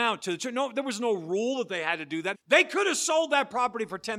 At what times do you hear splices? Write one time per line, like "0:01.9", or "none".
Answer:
0:02.3

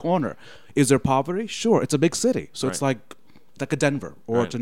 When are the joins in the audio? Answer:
none

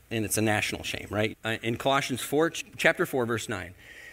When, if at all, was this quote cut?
0:01.3

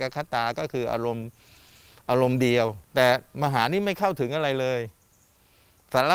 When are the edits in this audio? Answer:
0:02.9

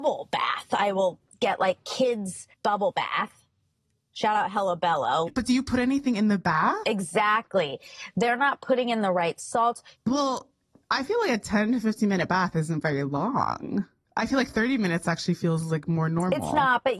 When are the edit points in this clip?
0:02.5
0:05.3
0:09.9

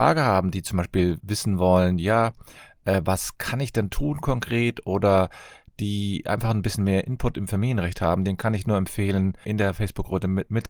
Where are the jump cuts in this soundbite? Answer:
0:09.4

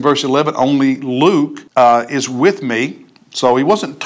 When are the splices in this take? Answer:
0:01.7

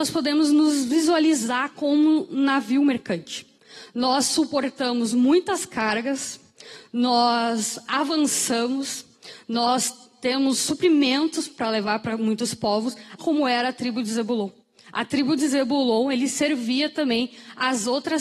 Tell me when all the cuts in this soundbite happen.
0:13.2

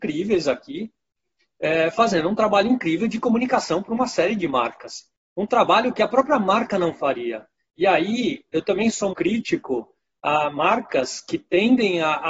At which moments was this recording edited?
0:09.1

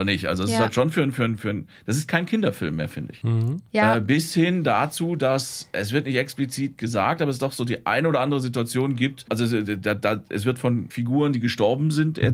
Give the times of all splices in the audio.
0:03.7

